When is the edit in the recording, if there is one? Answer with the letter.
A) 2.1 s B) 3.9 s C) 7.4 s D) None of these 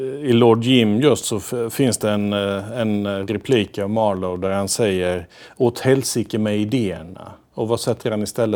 C